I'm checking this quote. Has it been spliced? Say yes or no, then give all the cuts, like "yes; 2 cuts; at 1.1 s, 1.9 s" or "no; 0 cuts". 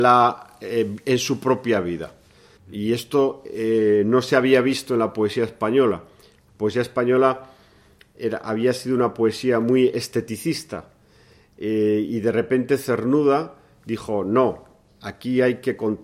yes; 1 cut; at 2.6 s